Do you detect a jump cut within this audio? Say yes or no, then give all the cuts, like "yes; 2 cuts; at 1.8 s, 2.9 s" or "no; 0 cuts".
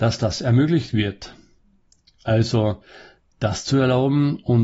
no; 0 cuts